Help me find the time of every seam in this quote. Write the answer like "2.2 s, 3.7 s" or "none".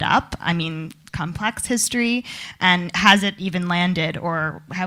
1.1 s